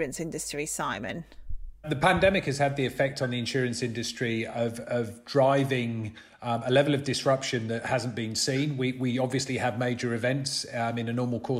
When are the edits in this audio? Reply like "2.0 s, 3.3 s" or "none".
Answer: none